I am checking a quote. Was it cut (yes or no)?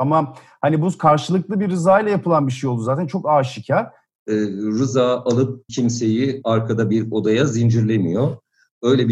yes